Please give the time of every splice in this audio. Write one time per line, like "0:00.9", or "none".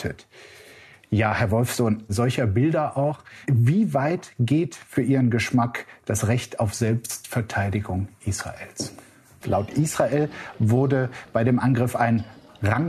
0:02.1
0:03.4
0:09.4